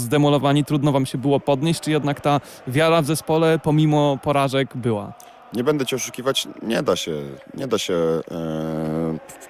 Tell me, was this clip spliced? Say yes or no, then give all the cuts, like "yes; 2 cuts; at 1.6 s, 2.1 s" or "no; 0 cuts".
no; 0 cuts